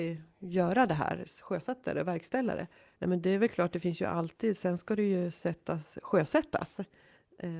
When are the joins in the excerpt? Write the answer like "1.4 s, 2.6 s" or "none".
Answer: 3.0 s